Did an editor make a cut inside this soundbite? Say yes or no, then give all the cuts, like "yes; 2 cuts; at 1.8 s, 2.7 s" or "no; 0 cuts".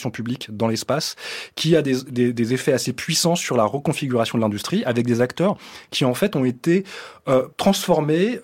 yes; 1 cut; at 7.5 s